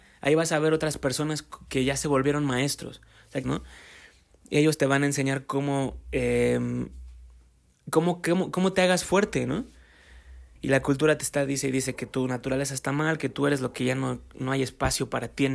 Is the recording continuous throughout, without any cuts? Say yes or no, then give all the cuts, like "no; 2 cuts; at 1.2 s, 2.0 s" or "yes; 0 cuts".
no; 2 cuts; at 3.4 s, 10.6 s